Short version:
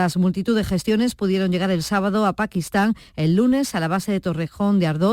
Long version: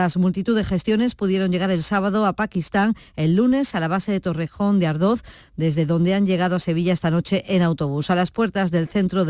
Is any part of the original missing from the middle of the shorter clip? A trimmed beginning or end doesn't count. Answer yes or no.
no